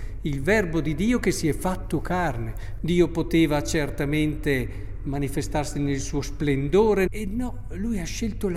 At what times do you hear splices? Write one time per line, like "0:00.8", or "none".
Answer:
0:02.8
0:07.1